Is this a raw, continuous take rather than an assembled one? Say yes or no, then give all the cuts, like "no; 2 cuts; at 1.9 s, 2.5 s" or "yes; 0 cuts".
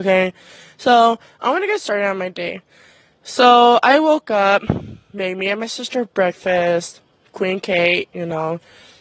yes; 0 cuts